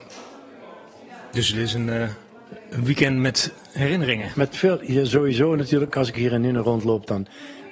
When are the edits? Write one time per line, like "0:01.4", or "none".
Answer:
none